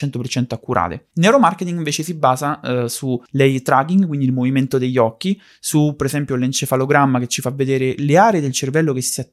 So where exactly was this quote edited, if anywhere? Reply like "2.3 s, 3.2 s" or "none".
3.3 s